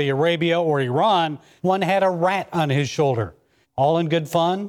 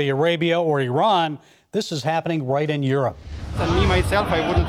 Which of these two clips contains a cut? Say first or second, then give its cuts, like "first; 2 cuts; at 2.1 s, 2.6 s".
first; 2 cuts; at 1.6 s, 3.6 s